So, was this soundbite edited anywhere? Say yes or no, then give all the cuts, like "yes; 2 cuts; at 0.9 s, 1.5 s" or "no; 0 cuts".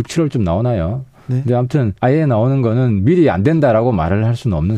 yes; 1 cut; at 2.0 s